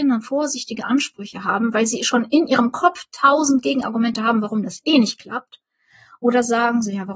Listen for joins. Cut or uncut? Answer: uncut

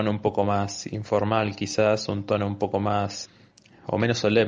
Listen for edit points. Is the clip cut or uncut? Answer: uncut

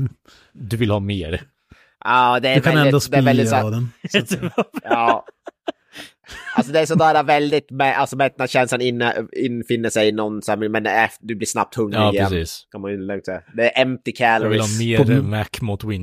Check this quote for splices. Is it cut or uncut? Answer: uncut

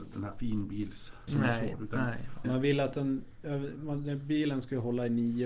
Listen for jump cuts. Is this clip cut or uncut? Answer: cut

